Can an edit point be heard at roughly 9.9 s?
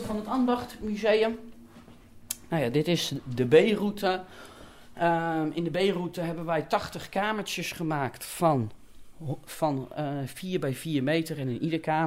no; 0 cuts

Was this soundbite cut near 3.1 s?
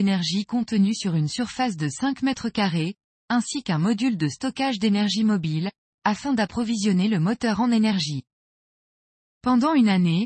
no; 0 cuts

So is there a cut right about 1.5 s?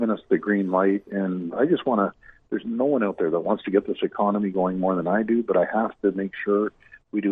yes; 1 cut; at 1.5 s

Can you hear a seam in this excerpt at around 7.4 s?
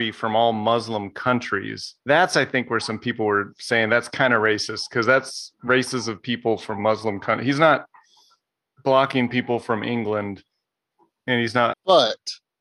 no; 2 cuts; at 2.0 s, 11.7 s

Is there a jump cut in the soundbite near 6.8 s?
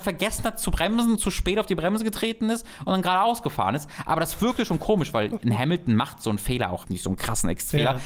yes; 1 cut; at 6.8 s

